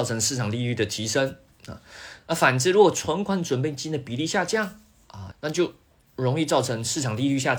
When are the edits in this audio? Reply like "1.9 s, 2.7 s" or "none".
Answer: 5.3 s